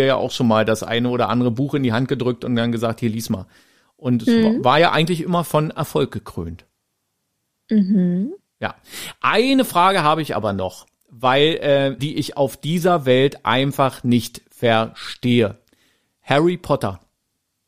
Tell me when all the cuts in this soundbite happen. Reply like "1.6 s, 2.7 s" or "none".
12.0 s